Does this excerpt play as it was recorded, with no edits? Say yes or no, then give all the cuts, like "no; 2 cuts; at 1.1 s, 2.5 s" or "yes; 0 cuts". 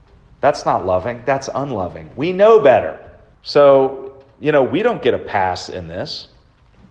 no; 1 cut; at 3.3 s